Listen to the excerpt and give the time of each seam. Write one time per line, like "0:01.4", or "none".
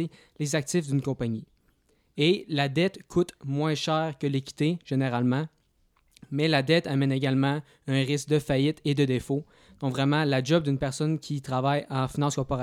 none